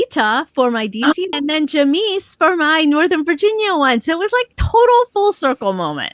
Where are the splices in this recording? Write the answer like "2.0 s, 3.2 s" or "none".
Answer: 1.3 s